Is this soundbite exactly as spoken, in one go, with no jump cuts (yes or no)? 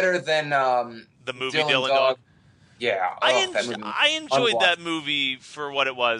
yes